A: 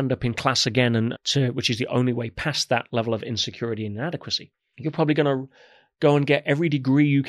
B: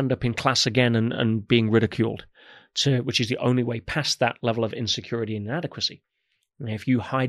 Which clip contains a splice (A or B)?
A